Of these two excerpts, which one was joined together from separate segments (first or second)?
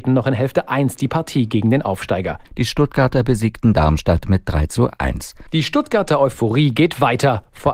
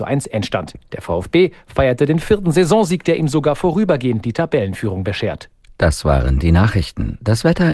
first